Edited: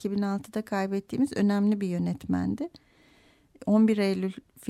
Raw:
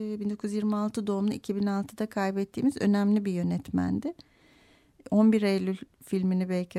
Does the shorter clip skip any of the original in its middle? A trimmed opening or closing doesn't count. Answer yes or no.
no